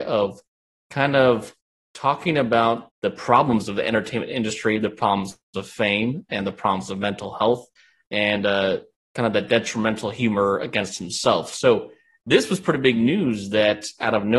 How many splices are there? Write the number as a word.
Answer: one